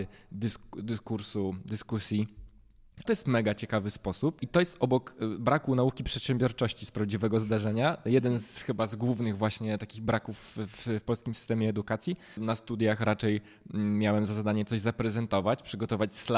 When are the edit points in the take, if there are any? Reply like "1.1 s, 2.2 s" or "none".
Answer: 3.0 s, 4.4 s, 12.4 s